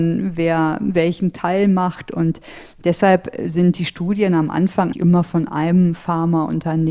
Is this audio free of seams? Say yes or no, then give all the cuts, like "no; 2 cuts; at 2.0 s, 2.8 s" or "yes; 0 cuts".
no; 1 cut; at 4.9 s